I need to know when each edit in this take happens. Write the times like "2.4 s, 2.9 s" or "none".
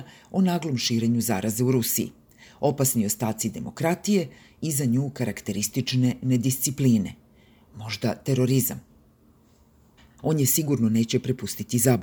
10.2 s